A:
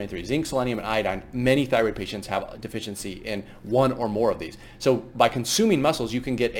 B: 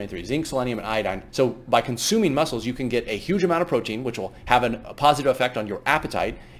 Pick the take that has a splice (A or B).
B